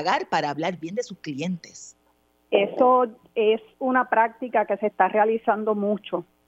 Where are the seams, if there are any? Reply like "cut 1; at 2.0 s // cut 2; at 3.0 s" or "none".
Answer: cut 1; at 2.5 s